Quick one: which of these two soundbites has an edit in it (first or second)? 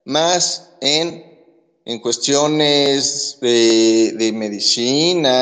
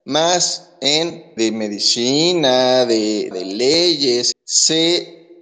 second